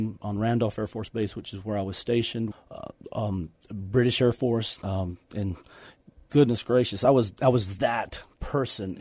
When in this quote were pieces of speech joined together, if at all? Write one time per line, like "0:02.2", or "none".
0:02.5
0:04.8